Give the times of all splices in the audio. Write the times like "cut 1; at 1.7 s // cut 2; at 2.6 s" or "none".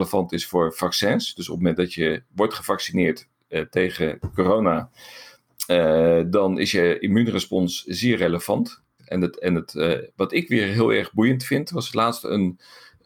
cut 1; at 9.0 s